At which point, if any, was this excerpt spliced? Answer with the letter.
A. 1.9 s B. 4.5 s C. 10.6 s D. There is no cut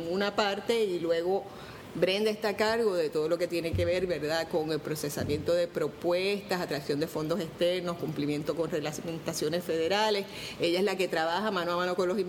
A